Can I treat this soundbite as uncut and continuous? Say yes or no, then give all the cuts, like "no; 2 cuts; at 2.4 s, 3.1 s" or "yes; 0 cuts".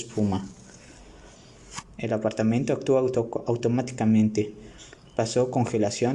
no; 1 cut; at 1.8 s